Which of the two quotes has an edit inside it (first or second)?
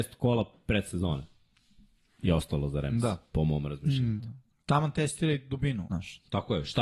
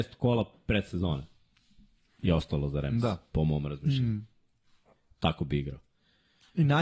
first